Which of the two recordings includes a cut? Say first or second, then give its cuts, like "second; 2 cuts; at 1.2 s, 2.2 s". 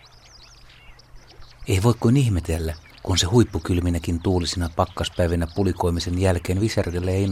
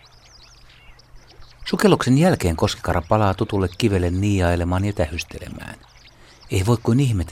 first; 2 cuts; at 1.6 s, 2.9 s